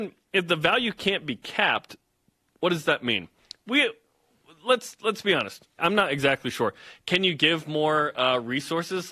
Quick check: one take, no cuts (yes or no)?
no